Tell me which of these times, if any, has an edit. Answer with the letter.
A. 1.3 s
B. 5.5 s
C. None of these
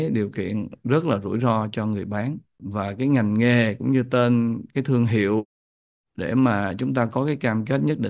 C